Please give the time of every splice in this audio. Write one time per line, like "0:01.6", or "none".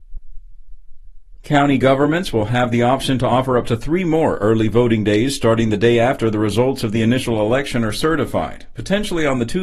0:01.4